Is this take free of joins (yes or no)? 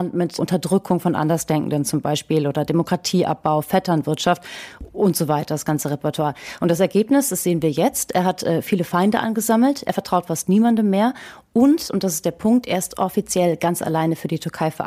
yes